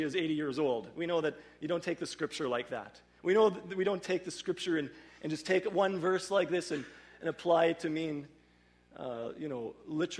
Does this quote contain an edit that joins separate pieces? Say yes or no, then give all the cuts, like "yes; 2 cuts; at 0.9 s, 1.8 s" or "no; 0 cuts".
yes; 1 cut; at 3.2 s